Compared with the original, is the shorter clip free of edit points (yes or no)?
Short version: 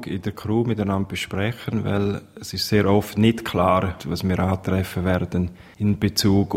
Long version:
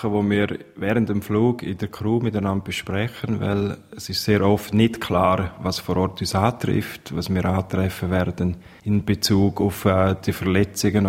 no